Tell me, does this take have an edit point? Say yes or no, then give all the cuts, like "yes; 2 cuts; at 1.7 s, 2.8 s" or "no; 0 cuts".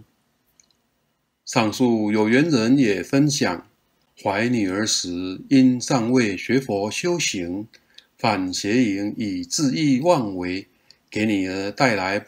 no; 0 cuts